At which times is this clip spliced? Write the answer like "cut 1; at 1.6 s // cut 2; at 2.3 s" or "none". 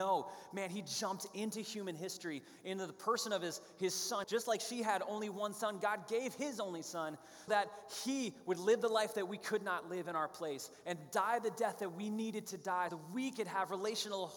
cut 1; at 4.2 s // cut 2; at 7.5 s // cut 3; at 12.9 s